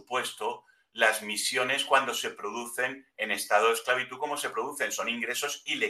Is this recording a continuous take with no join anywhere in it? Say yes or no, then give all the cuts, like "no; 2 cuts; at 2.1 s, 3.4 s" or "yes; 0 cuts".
yes; 0 cuts